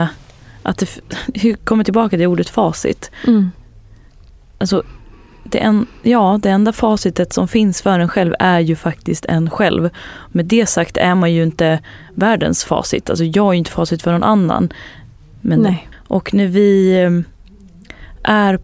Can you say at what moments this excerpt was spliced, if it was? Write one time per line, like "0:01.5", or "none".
0:15.9

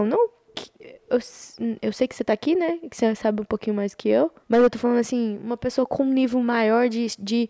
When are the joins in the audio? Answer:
0:04.4

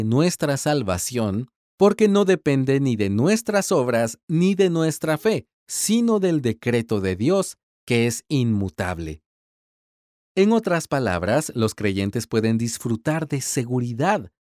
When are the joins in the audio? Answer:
none

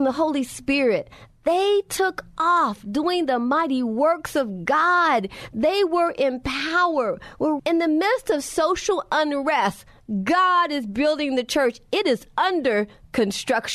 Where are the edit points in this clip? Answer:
0:07.6

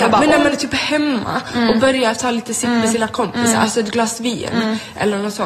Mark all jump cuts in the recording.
none

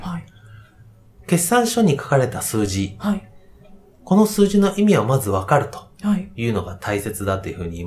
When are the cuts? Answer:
none

